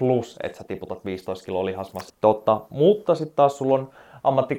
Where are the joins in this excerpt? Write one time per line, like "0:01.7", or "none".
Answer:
0:02.1